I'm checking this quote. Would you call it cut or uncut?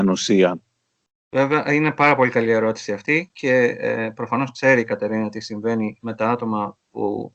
uncut